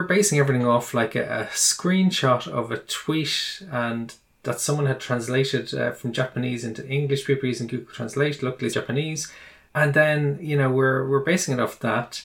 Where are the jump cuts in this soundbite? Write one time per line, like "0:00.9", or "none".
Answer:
0:08.7